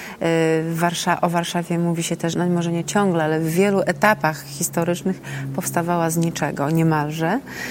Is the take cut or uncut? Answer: cut